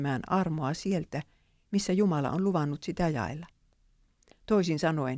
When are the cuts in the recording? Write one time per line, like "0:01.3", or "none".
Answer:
none

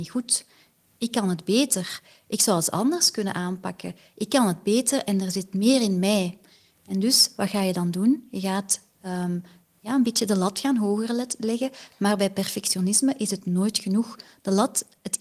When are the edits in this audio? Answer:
none

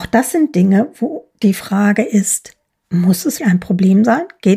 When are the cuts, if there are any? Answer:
0:03.4

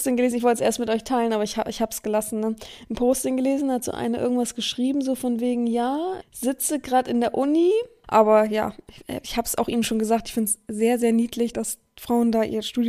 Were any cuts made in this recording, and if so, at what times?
0:06.2
0:08.0
0:11.5

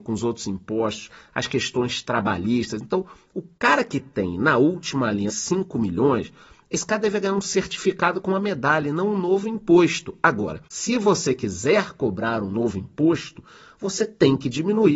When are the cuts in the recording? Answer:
0:05.3
0:10.7

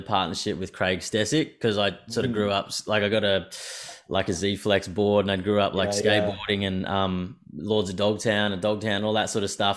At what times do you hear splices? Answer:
none

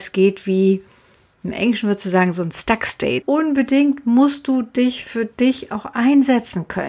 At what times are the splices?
0:03.2

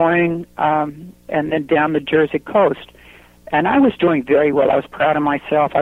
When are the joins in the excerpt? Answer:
0:01.3

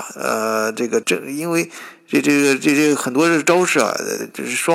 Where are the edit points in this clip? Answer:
0:01.0

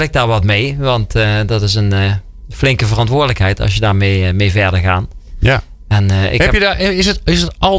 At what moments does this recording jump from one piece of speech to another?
none

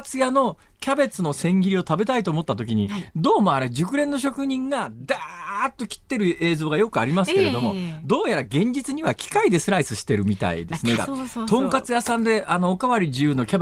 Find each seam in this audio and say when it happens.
0:11.0

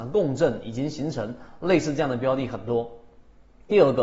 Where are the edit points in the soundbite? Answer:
none

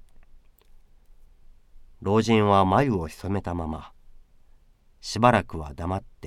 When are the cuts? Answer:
none

